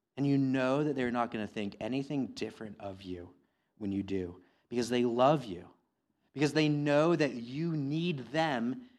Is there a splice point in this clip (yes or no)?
no